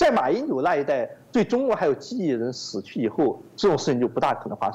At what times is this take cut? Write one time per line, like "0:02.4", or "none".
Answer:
none